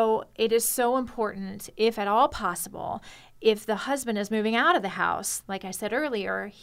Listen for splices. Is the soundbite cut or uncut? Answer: uncut